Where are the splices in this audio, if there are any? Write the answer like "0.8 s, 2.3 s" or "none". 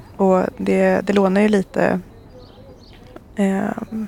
none